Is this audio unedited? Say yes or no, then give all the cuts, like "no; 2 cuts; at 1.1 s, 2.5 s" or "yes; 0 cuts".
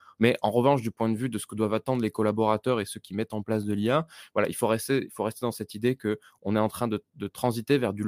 yes; 0 cuts